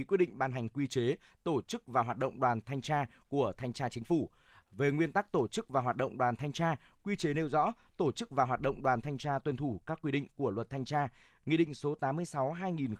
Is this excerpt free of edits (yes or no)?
yes